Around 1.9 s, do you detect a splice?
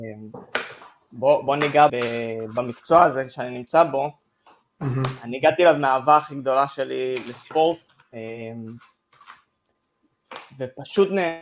yes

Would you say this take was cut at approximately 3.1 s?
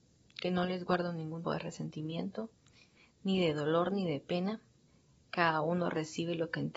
no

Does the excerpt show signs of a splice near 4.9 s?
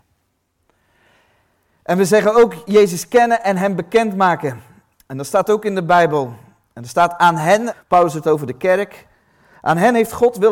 no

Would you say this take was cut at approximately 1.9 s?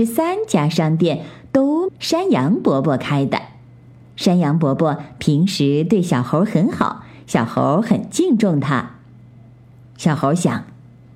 yes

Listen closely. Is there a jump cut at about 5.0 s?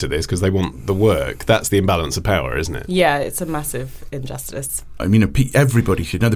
yes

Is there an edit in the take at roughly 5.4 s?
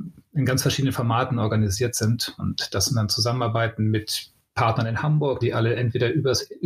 yes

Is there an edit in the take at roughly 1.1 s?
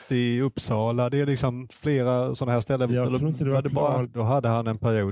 no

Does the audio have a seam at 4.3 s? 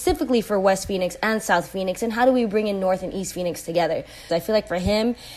yes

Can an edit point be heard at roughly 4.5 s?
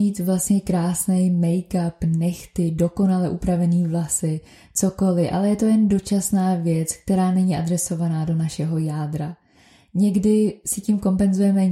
no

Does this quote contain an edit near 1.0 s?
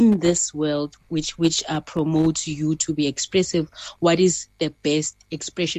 yes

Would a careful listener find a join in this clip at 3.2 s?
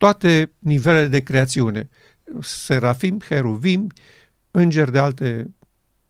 no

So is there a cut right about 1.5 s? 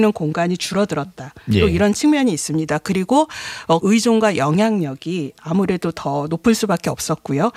no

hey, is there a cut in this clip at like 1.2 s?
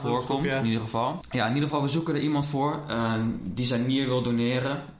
yes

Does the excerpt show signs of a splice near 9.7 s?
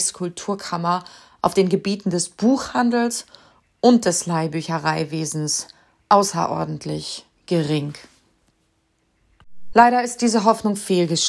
yes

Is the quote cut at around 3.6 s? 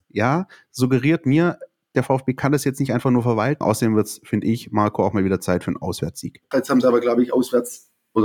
yes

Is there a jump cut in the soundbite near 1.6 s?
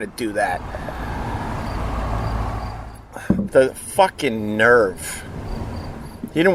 no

